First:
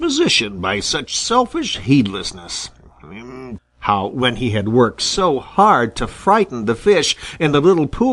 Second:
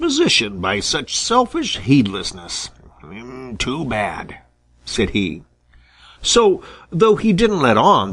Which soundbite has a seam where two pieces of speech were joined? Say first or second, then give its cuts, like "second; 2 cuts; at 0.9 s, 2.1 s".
first; 1 cut; at 3.6 s